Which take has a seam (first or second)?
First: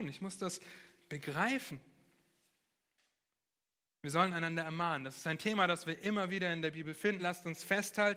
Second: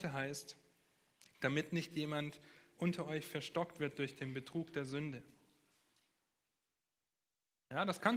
first